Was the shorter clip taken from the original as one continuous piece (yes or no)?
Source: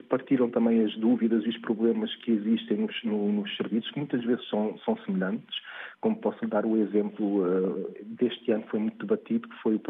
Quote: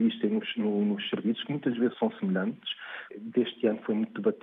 no